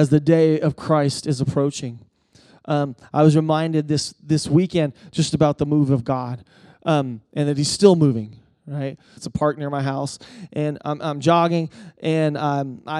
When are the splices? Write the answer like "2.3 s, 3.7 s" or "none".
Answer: 9.2 s